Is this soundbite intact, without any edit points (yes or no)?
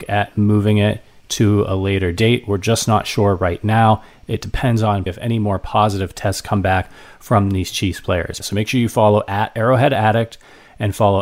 no